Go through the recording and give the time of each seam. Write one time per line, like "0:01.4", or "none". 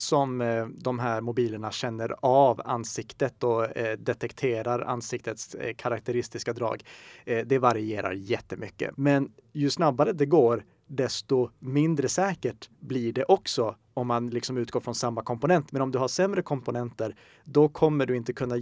0:08.9
0:15.7